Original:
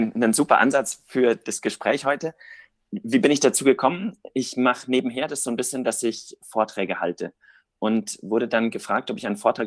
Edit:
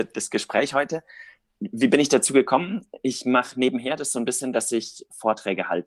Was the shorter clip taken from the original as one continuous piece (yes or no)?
yes